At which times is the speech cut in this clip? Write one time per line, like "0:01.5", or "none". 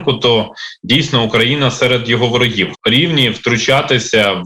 0:02.7

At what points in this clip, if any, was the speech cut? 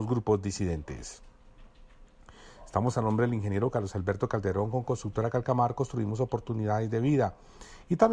none

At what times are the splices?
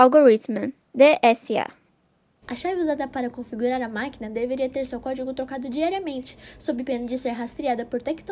0:02.4

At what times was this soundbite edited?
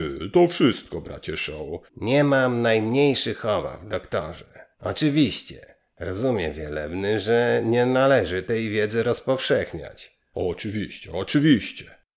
0:01.9
0:04.7

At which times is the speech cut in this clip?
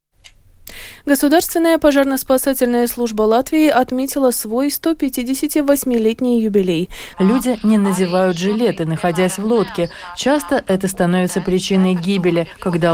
0:07.1

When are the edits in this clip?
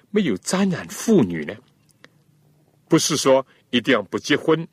none

